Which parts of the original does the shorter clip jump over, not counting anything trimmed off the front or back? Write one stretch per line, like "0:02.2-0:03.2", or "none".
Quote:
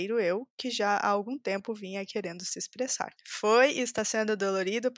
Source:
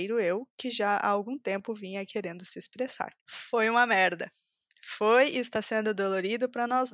0:03.2-0:04.7